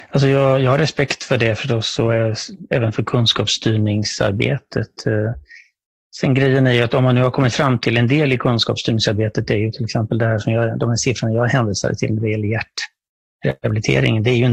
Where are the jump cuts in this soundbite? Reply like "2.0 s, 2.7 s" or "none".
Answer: none